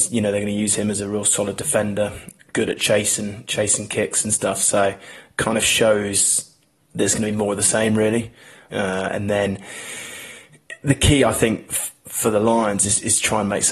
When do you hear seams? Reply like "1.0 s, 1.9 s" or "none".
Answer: none